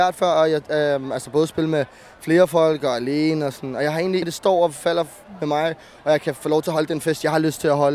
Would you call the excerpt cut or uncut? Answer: cut